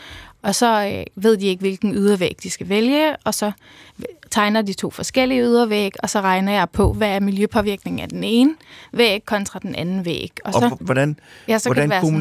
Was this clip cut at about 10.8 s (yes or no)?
yes